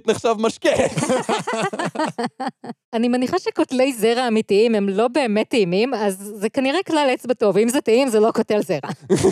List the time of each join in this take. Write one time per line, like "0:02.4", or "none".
0:02.8